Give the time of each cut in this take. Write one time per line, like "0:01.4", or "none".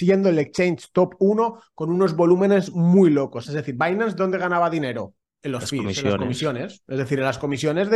0:03.4